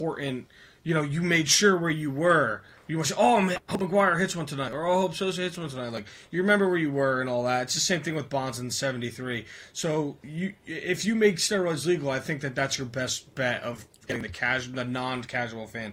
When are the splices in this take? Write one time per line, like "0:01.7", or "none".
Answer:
none